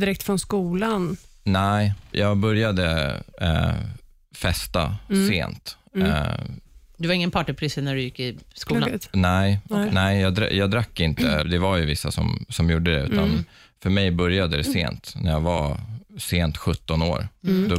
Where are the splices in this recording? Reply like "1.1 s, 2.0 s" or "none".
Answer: 2.1 s, 11.4 s